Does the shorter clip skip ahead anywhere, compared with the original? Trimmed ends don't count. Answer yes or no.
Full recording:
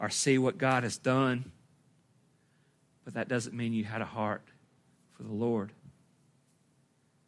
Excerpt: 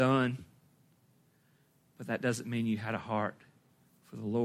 no